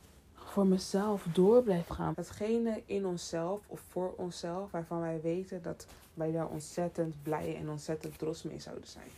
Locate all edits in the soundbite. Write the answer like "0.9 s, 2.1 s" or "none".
2.1 s